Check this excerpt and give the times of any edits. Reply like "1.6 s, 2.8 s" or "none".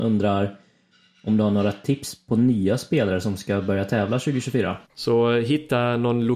4.9 s